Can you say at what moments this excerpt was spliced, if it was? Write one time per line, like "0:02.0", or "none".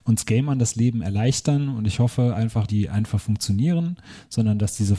0:02.7